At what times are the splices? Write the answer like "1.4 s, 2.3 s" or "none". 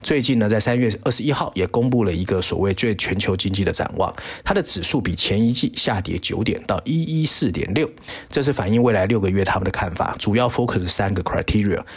none